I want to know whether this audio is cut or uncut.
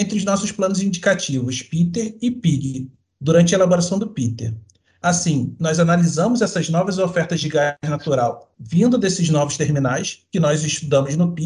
uncut